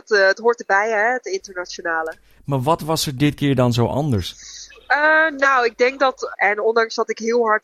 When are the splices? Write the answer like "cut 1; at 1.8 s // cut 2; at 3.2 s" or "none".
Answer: cut 1; at 2.4 s // cut 2; at 6.3 s